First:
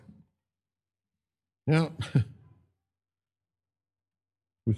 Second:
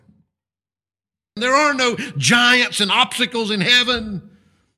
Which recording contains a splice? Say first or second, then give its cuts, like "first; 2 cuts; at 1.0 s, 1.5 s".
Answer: second; 1 cut; at 1.4 s